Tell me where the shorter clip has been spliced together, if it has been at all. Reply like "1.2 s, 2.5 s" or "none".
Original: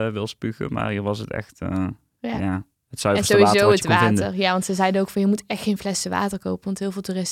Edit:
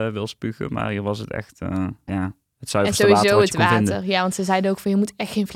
2.1 s